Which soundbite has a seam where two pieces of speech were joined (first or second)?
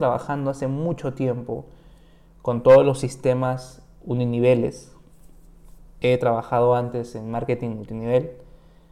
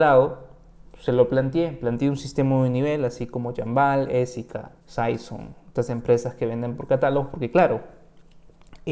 second